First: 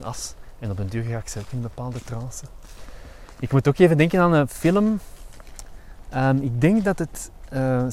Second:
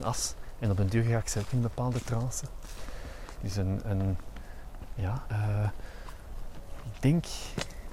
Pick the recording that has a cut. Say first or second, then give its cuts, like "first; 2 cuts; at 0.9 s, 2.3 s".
second; 2 cuts; at 3.4 s, 5.2 s